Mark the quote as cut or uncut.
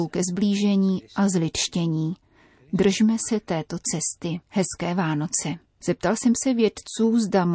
cut